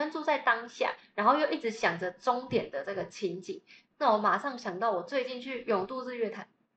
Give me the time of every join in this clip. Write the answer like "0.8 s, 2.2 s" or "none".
none